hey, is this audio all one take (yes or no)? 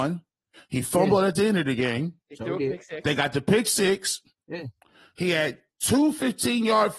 yes